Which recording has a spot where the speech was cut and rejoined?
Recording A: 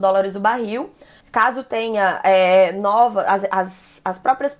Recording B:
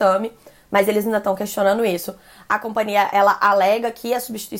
A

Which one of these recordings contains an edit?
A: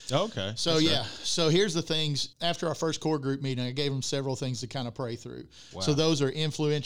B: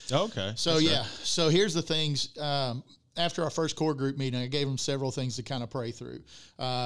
A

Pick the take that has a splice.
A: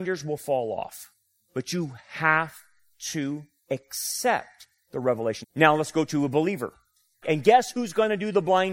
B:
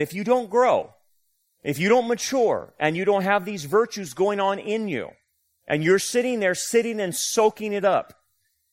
A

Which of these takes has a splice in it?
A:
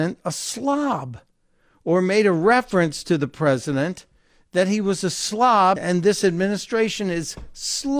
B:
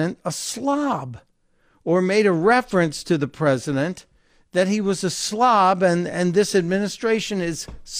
A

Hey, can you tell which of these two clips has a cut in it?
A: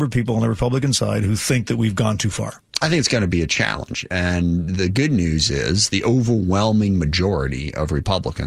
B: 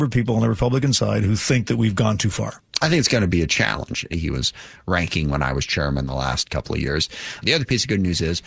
B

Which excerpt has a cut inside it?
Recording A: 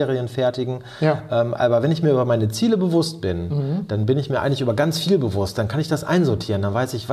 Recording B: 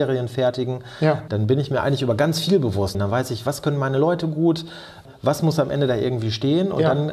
B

